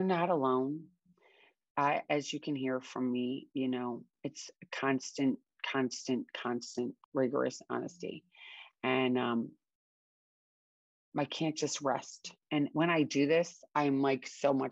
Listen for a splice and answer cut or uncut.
cut